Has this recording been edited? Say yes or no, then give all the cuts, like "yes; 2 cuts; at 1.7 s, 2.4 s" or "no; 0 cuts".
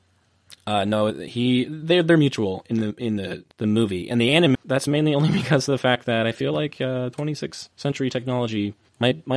yes; 2 cuts; at 3.5 s, 4.6 s